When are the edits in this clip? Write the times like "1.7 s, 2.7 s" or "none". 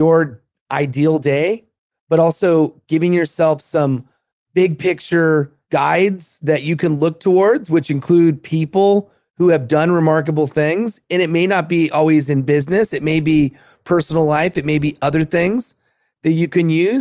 none